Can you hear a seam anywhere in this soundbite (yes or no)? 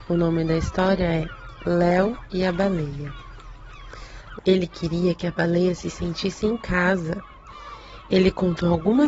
yes